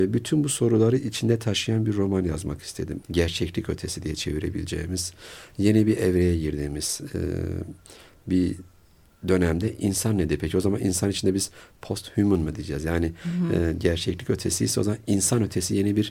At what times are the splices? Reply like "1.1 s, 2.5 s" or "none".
3.0 s

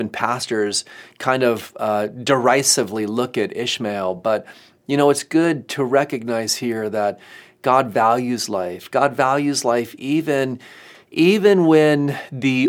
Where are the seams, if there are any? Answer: none

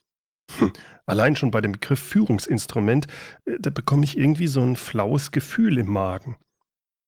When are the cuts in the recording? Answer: none

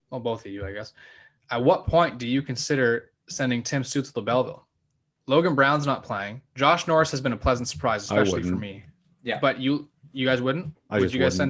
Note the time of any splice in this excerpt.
none

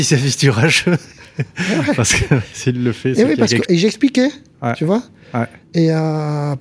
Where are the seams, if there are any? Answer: 3.6 s

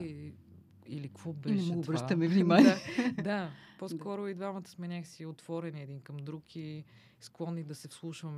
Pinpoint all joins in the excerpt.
none

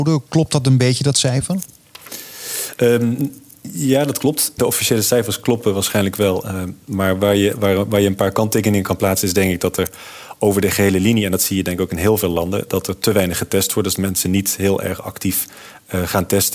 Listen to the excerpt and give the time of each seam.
4.6 s

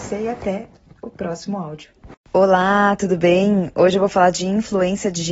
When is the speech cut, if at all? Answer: none

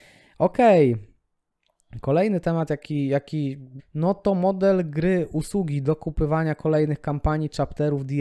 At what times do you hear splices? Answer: 3.8 s

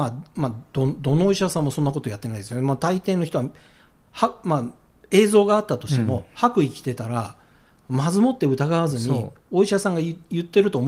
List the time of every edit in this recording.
none

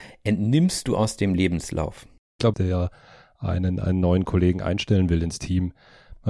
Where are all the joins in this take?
2.5 s

